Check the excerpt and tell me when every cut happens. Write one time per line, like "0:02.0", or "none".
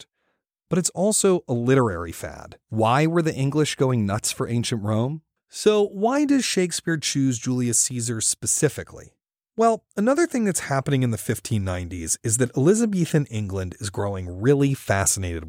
0:02.6
0:05.4